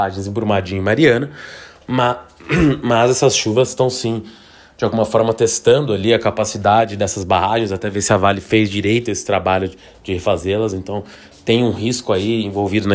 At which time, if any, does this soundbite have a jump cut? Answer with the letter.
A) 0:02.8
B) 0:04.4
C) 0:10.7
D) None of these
D